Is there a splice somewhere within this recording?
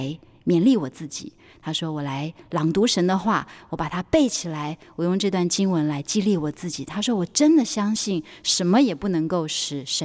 no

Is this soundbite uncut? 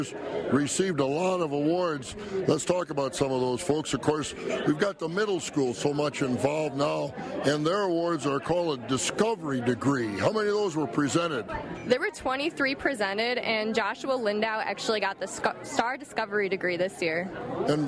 yes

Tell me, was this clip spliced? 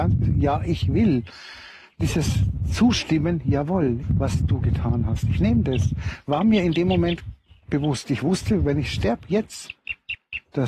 yes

